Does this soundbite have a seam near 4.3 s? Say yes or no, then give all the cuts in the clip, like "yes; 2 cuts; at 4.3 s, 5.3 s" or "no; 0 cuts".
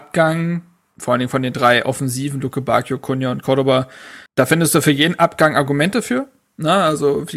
yes; 1 cut; at 4.3 s